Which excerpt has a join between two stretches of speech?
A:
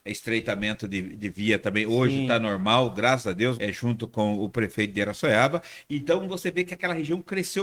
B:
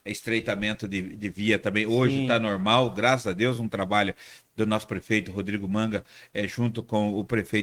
A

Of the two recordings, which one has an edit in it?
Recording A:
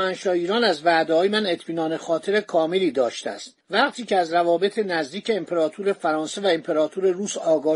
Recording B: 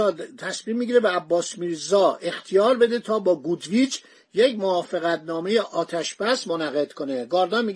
A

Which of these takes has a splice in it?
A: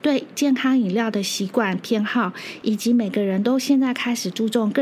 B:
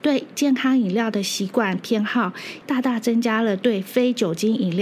B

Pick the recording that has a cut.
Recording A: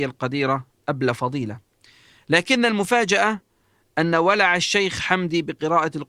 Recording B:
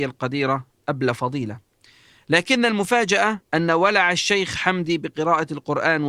B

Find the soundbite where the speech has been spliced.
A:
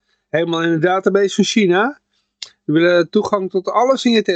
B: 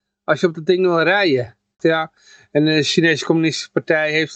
B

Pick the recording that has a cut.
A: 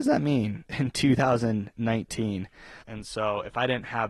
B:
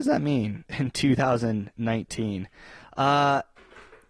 A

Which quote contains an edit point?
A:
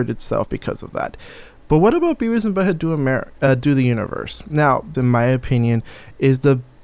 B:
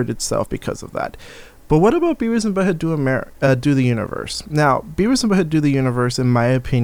A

